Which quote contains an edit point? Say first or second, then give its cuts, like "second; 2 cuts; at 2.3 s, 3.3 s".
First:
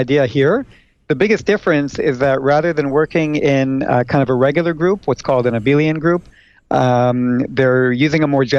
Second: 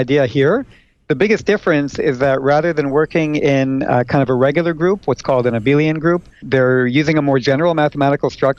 second; 1 cut; at 6.4 s